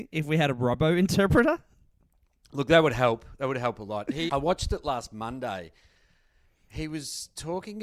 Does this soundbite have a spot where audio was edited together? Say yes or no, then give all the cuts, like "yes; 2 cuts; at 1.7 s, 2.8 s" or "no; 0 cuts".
yes; 1 cut; at 4.3 s